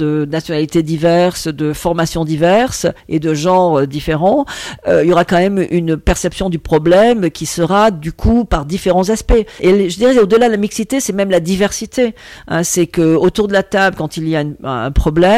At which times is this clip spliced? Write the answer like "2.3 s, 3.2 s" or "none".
9.6 s

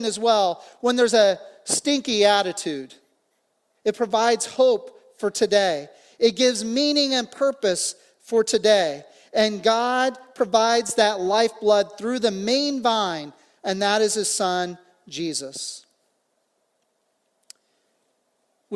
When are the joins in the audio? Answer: 3.7 s

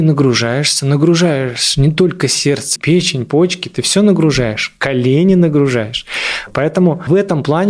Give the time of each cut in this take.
2.8 s

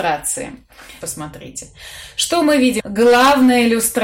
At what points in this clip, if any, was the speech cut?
1.0 s, 2.8 s

